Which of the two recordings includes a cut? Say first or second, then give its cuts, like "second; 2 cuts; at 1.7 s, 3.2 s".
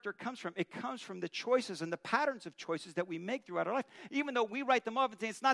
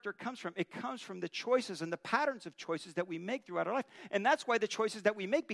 first; 1 cut; at 4.1 s